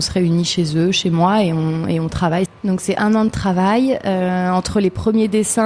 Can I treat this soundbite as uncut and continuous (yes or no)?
no